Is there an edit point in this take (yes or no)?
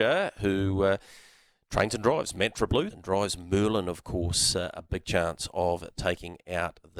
yes